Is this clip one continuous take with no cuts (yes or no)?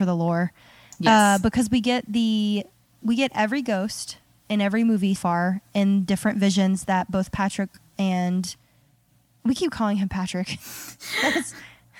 no